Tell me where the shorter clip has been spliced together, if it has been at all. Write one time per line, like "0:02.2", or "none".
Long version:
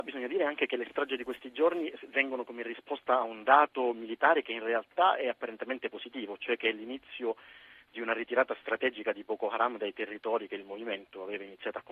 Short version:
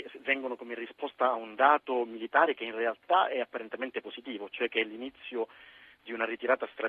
none